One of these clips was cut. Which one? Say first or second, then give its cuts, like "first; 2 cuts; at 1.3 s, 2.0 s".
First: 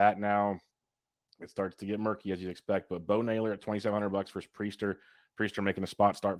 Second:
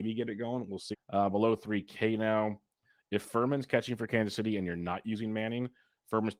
second; 1 cut; at 0.9 s